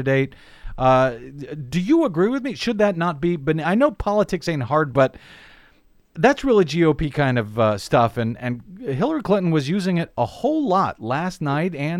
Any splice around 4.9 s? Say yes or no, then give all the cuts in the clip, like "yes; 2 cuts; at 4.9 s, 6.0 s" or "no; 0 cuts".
yes; 1 cut; at 4.9 s